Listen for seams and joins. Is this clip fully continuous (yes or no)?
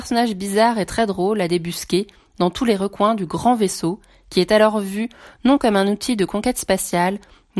yes